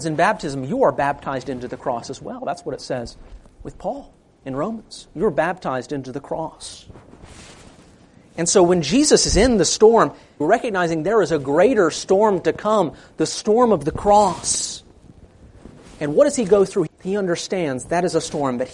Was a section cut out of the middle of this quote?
yes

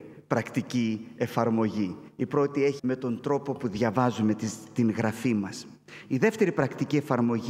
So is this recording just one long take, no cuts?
no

